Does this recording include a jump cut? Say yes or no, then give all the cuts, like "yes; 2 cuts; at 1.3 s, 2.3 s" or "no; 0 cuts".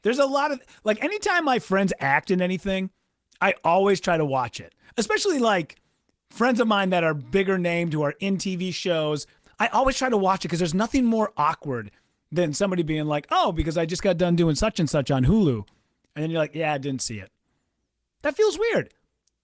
no; 0 cuts